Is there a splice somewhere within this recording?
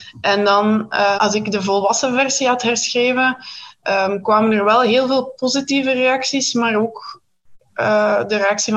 yes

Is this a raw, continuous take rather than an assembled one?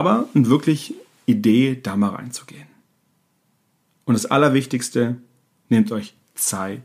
yes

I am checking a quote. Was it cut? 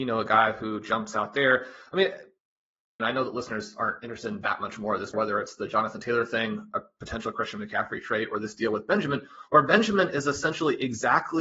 yes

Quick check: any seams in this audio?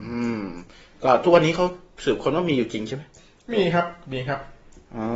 no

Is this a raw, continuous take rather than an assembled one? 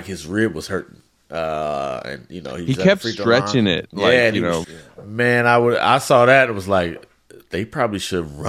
no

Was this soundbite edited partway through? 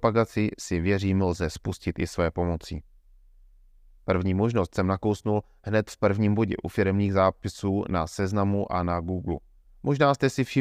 yes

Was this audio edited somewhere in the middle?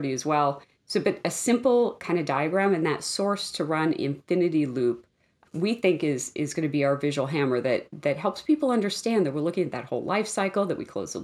no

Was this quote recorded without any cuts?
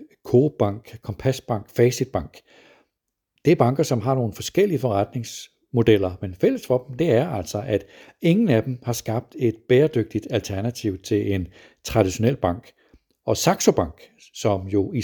yes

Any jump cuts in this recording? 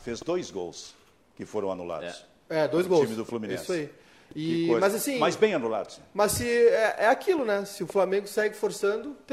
no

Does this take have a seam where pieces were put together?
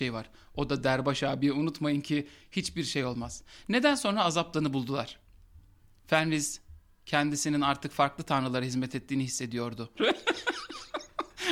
yes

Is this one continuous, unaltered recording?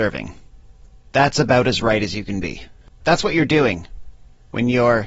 no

